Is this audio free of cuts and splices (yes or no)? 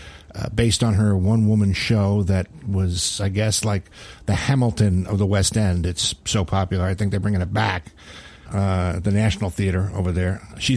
no